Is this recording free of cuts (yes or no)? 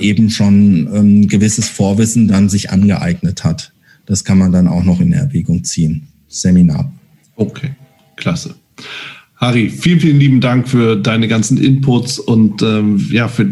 yes